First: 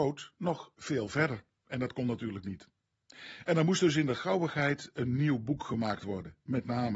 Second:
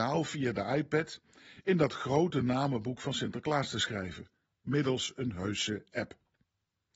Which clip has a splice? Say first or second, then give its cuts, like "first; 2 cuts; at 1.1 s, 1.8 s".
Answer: first; 1 cut; at 1.6 s